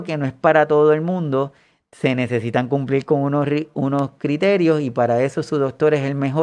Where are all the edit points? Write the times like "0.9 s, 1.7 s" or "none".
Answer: none

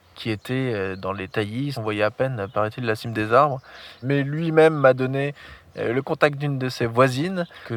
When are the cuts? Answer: 1.7 s, 4.0 s

